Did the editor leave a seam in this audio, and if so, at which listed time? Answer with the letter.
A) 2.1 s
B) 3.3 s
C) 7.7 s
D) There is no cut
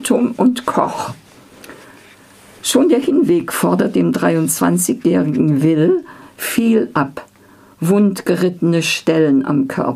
D